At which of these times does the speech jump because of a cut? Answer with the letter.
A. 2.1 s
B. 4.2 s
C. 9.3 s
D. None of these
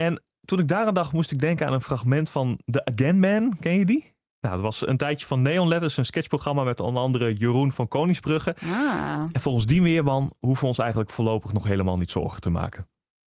B